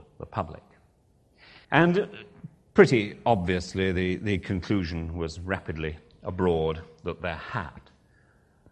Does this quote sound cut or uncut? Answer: cut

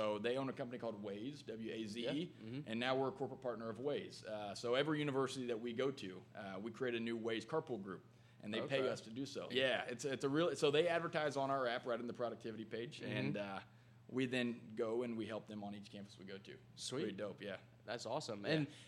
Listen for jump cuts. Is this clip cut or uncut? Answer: cut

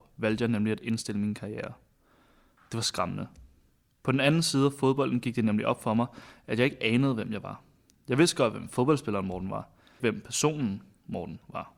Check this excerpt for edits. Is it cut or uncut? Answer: cut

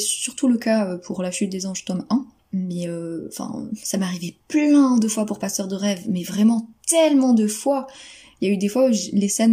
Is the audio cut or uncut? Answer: cut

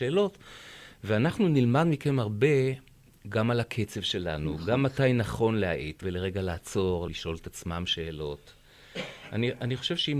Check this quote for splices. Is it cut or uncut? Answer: cut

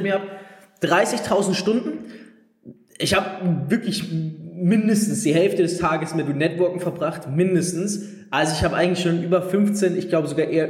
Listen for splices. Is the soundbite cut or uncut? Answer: uncut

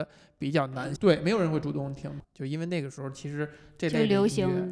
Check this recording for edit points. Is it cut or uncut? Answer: cut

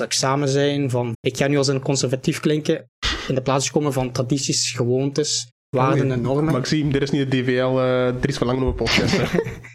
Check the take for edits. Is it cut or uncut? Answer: cut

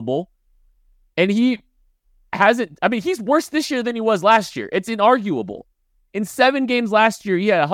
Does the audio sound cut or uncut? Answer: uncut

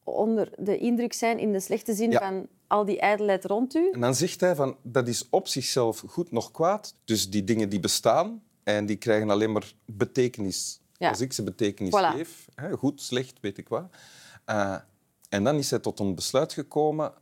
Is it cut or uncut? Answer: cut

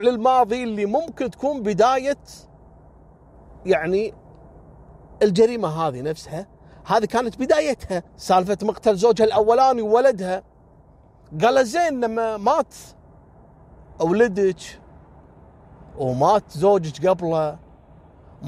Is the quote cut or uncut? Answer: cut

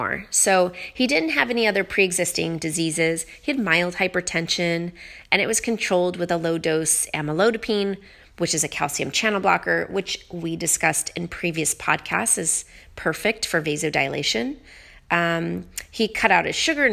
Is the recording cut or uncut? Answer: uncut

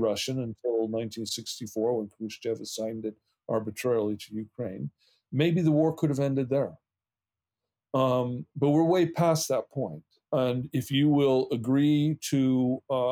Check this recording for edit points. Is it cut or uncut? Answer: cut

